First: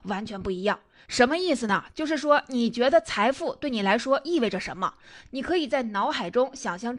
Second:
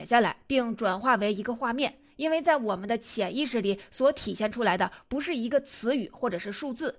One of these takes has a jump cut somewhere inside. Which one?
first; 2 cuts; at 1.1 s, 5.3 s

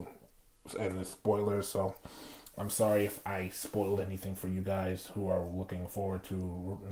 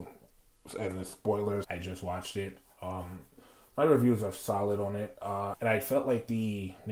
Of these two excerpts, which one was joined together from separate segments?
second; 2 cuts; at 1.6 s, 5.5 s

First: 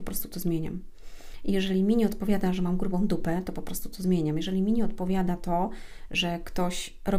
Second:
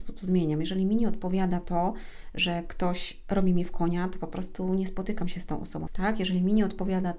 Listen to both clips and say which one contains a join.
second; 1 cut; at 5.9 s

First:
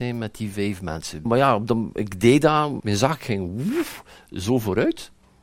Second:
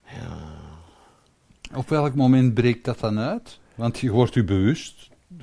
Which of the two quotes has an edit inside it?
first; 2 cuts; at 1.3 s, 2.8 s

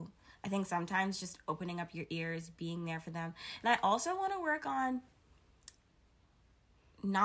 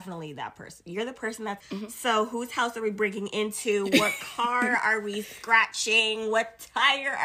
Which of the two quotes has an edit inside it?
second; 1 cut; at 1.6 s

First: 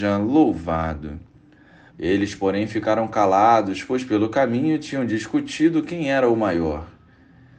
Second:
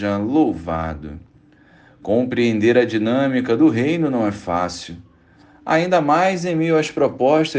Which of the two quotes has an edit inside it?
first; 1 cut; at 1.9 s

